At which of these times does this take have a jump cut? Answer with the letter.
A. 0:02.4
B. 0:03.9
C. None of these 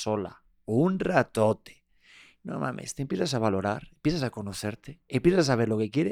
C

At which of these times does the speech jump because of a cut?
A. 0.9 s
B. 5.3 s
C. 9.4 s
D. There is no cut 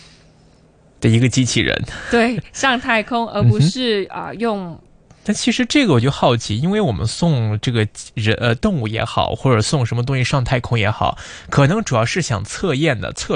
B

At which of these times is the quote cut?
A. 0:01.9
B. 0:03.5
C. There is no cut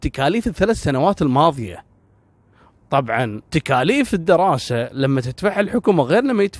B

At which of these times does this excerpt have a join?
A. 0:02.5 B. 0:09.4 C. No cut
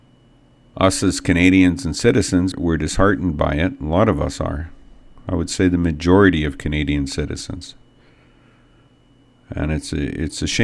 A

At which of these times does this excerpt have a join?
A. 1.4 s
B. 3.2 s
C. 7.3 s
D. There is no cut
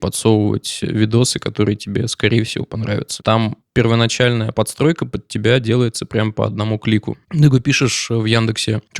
B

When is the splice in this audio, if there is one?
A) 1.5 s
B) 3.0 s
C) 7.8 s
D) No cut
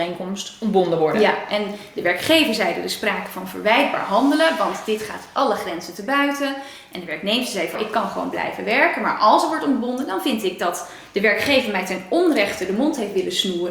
C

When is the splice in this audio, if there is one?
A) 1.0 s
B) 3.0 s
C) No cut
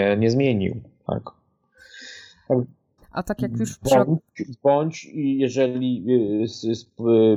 B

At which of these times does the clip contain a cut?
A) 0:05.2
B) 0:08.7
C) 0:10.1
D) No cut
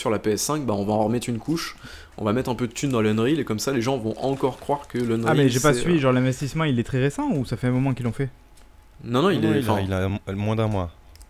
D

